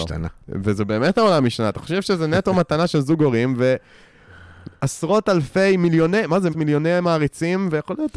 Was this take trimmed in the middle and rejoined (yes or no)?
yes